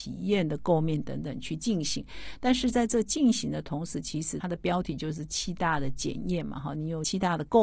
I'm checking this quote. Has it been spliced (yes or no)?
no